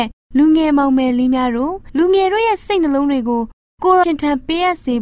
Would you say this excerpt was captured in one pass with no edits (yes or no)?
no